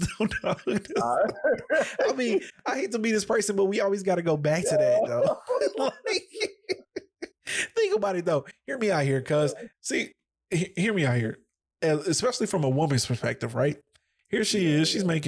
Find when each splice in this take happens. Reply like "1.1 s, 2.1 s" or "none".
none